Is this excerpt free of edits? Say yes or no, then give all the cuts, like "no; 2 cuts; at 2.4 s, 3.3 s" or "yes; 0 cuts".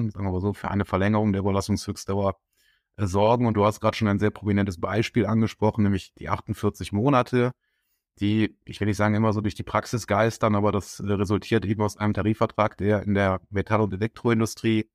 yes; 0 cuts